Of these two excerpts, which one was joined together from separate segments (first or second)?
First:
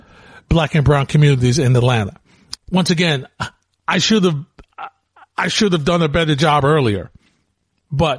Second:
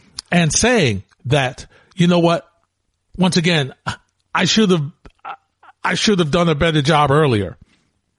first